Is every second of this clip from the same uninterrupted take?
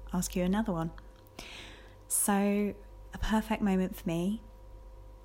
yes; 0 cuts

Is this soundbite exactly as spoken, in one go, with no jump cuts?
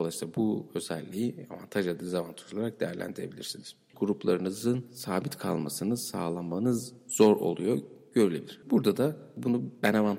no; 2 cuts; at 3.9 s, 8.6 s

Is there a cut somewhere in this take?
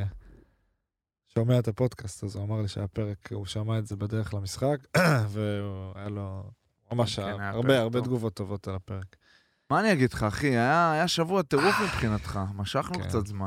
no; 0 cuts

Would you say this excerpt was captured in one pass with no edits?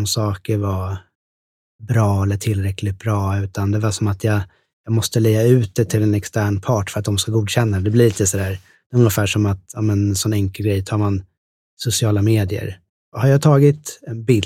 yes; 0 cuts

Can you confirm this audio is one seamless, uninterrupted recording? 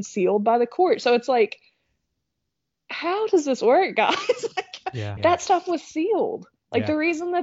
no; 1 cut; at 5.2 s

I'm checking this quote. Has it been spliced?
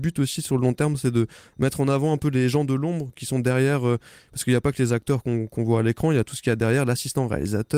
no; 0 cuts

